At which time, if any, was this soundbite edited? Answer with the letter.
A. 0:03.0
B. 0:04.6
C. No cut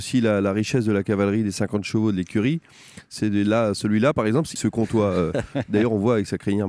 B